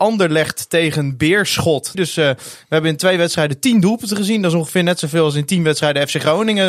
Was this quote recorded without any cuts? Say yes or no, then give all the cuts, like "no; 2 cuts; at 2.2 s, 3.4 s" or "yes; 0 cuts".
no; 1 cut; at 1.9 s